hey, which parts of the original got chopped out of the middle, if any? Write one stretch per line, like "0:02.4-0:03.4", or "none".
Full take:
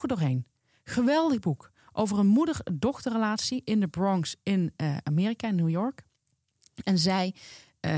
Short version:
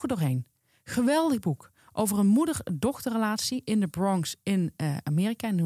none